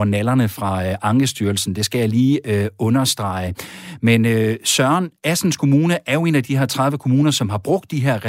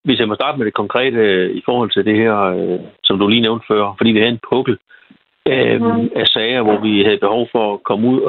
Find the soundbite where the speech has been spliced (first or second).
second